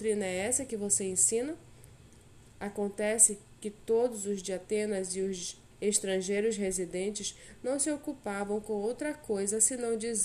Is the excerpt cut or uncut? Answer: cut